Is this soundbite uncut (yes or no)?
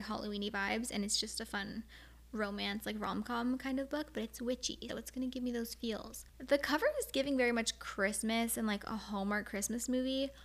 no